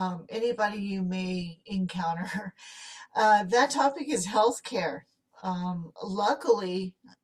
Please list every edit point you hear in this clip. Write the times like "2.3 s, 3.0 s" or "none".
none